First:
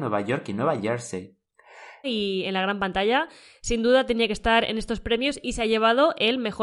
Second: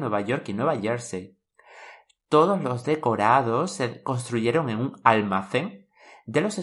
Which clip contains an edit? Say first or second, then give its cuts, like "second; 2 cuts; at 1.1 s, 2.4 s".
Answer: first; 1 cut; at 2.0 s